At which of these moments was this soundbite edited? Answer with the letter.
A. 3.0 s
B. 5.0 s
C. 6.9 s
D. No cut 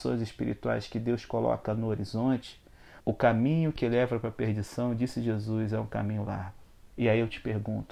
A